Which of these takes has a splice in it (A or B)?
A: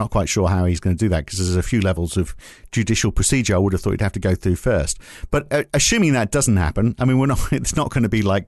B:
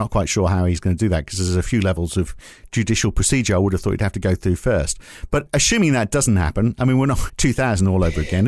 B